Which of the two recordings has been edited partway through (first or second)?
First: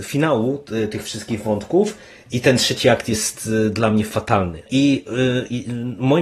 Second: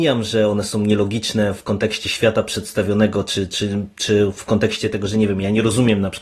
first